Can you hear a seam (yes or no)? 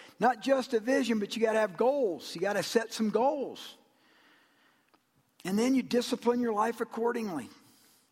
no